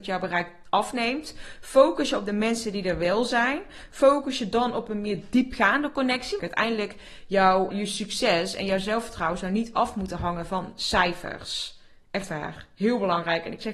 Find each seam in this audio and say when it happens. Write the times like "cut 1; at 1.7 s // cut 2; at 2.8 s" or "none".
cut 1; at 6.4 s // cut 2; at 7.7 s